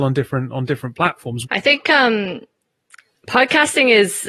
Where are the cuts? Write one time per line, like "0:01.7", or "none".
0:01.4